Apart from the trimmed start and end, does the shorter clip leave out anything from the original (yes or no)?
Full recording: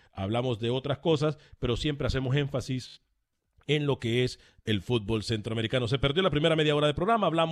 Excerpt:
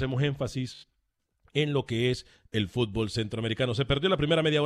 no